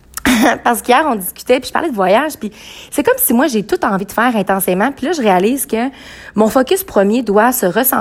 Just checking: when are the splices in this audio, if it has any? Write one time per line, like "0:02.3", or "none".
none